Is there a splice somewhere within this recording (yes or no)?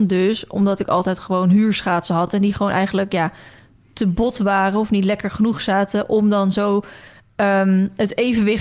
no